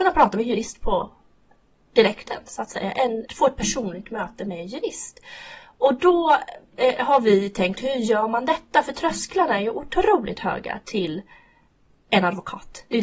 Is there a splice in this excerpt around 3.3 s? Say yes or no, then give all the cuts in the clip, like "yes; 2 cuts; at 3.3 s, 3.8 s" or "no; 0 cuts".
yes; 1 cut; at 3.3 s